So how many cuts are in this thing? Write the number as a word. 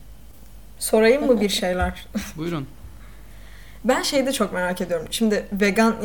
zero